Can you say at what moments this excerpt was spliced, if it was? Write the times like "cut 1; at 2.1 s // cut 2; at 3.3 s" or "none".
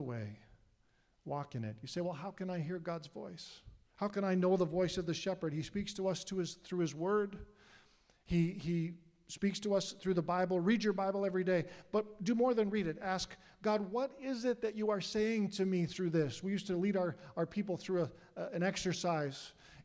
none

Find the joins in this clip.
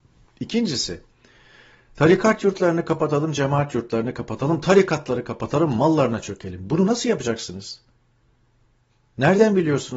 none

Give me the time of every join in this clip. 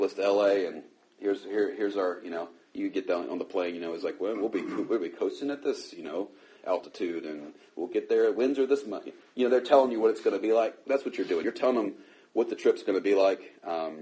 none

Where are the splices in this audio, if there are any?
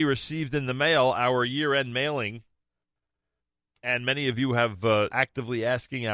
cut 1; at 5.1 s

